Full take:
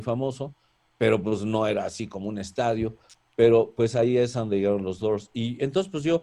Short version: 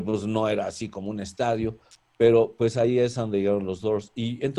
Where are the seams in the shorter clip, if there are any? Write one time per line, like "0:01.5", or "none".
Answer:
none